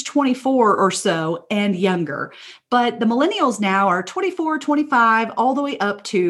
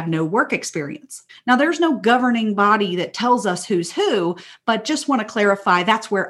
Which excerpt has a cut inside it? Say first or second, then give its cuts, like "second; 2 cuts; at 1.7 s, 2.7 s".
second; 1 cut; at 1.3 s